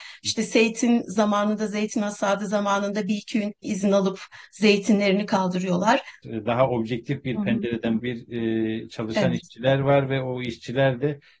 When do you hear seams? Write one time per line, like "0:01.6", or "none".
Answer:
0:06.2
0:08.0